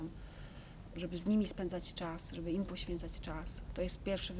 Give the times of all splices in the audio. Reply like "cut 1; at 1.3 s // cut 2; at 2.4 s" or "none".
none